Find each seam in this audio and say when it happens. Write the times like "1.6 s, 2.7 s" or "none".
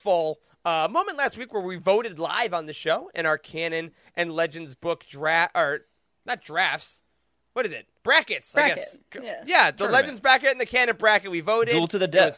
8.0 s